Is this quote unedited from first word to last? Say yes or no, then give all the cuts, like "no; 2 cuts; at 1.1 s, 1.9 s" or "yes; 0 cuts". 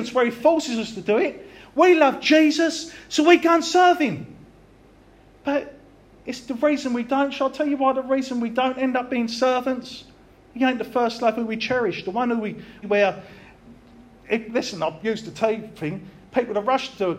no; 2 cuts; at 10.3 s, 12.8 s